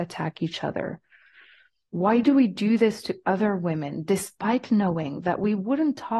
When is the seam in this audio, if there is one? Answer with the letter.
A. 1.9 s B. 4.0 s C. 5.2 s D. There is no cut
A